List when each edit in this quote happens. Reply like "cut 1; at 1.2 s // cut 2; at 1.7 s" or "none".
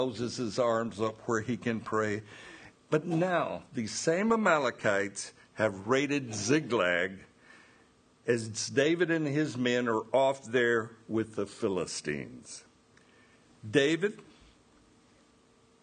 cut 1; at 2.7 s